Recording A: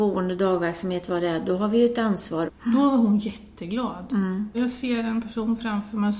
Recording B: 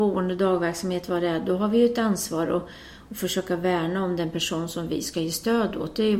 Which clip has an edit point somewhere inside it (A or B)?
A